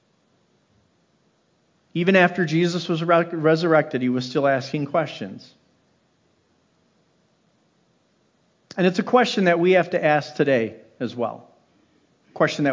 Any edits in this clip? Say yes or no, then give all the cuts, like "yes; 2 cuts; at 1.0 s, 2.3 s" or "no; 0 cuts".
no; 0 cuts